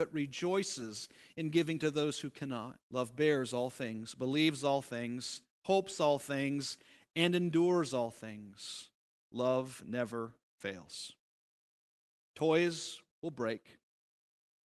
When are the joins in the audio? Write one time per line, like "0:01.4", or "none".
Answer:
0:02.8